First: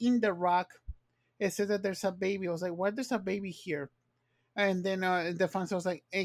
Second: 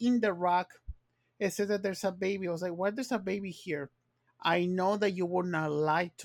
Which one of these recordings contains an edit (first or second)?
second